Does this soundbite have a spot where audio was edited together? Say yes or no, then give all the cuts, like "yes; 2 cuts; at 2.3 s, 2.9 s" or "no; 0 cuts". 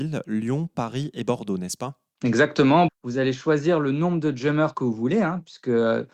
yes; 1 cut; at 2.9 s